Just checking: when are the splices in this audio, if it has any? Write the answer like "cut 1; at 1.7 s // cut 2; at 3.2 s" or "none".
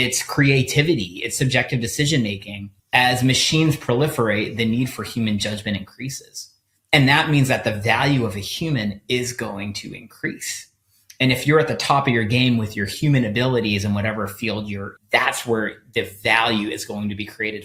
cut 1; at 2.8 s // cut 2; at 15.0 s